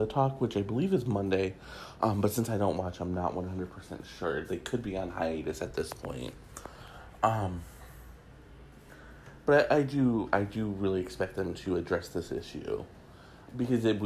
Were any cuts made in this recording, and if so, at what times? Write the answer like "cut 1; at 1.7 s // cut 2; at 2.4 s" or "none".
none